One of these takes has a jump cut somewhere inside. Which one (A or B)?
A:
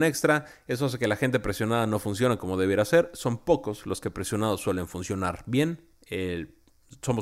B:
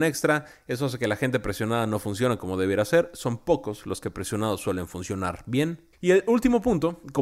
B